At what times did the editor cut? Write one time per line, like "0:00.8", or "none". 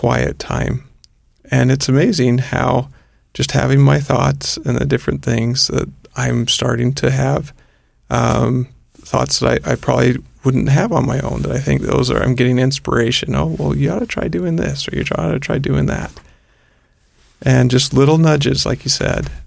none

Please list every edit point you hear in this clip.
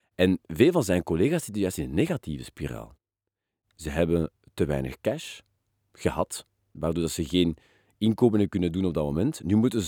none

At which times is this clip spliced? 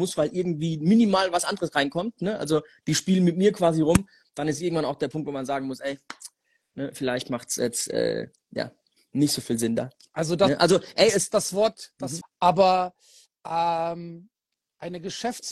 0:12.2

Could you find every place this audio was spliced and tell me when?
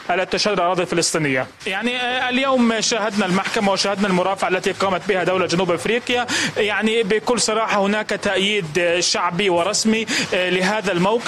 0:01.6

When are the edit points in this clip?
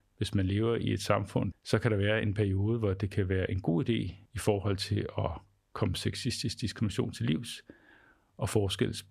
0:01.5
0:04.3

